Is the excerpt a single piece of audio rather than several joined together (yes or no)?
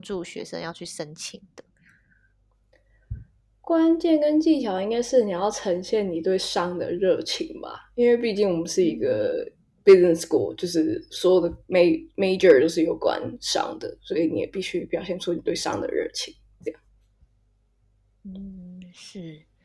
yes